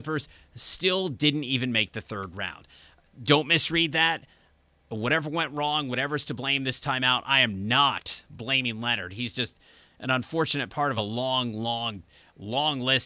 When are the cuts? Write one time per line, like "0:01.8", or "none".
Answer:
none

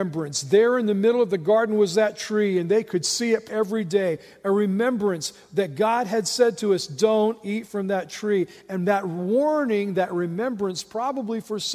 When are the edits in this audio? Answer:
0:03.5

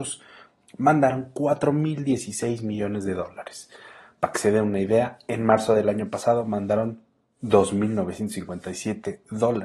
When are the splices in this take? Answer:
none

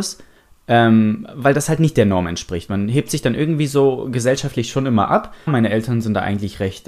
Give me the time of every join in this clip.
0:05.5

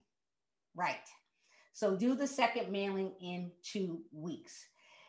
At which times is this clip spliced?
0:02.0

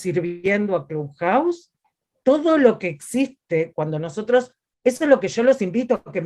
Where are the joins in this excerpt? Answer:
0:02.2

